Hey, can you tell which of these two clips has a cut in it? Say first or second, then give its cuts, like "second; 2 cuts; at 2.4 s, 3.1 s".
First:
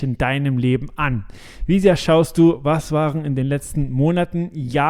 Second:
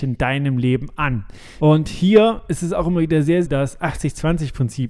second; 2 cuts; at 1.6 s, 3.4 s